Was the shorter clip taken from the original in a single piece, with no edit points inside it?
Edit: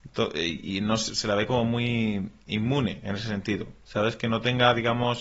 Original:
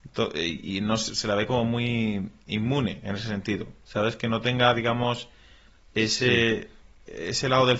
yes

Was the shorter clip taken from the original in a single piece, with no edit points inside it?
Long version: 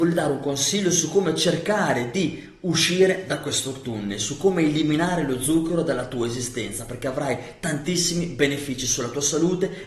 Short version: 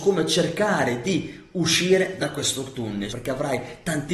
no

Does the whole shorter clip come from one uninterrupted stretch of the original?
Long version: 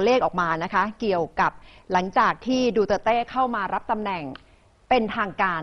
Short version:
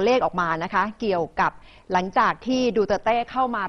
yes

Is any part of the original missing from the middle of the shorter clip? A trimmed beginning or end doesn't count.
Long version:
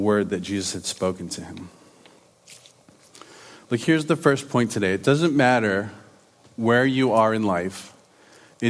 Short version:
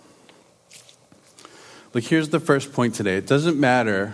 no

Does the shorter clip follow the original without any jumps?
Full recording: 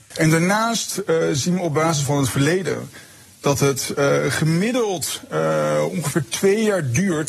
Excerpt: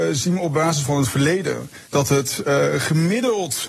no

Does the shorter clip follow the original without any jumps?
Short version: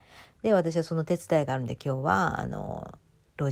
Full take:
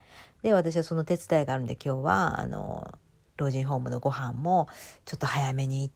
yes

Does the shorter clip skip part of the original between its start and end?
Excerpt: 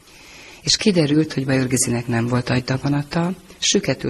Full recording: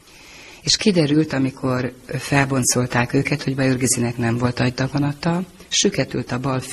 yes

